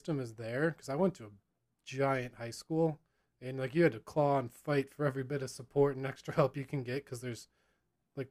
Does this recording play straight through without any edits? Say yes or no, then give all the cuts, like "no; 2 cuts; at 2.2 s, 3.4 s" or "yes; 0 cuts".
yes; 0 cuts